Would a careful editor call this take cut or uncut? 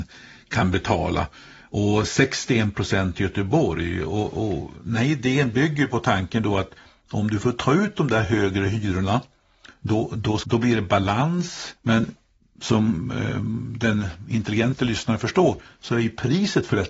cut